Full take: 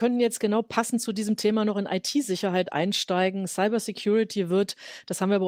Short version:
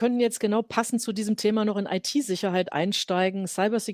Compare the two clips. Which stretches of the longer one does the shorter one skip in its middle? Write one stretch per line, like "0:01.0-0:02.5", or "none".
none